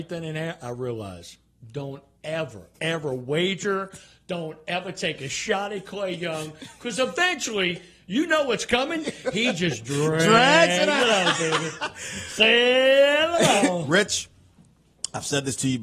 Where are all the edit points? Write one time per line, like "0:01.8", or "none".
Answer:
0:02.7